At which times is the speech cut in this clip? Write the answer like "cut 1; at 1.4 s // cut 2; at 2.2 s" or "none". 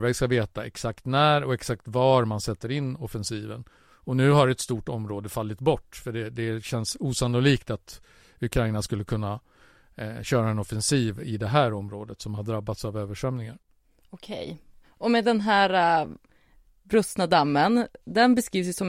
none